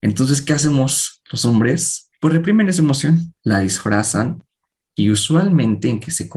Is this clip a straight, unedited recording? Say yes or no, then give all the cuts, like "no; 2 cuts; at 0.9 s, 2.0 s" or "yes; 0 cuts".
no; 2 cuts; at 2.1 s, 3.4 s